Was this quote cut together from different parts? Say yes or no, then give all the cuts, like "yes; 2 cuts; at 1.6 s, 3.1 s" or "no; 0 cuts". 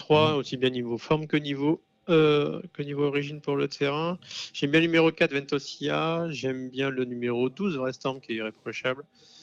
no; 0 cuts